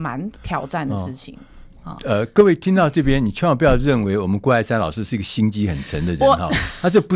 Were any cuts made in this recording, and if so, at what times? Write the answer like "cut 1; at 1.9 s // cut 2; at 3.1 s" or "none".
none